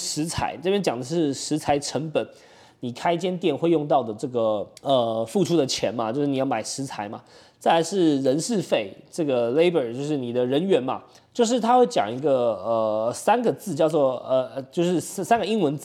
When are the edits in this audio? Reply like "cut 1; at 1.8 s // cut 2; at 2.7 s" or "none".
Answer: cut 1; at 4.8 s // cut 2; at 11.2 s